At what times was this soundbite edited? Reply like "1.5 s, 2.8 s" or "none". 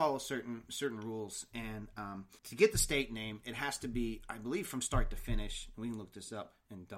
2.4 s